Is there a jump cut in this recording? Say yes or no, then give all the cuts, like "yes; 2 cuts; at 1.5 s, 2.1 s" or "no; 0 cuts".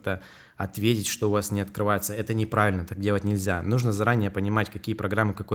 no; 0 cuts